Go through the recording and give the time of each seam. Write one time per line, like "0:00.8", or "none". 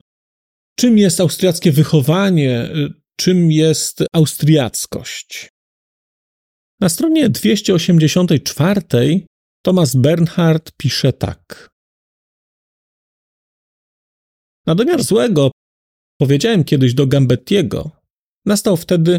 none